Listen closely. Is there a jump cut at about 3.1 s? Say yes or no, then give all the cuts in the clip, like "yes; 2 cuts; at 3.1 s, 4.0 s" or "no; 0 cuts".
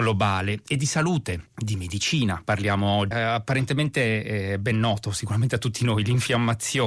yes; 2 cuts; at 1.5 s, 3.1 s